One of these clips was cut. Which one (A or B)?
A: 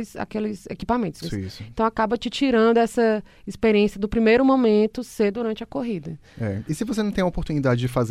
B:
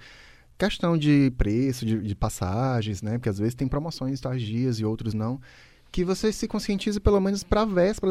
A